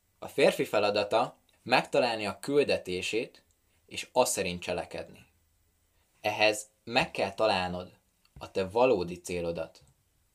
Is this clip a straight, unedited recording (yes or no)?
no